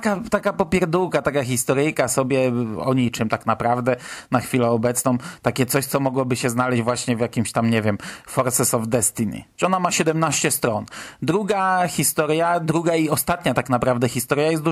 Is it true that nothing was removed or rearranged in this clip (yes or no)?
no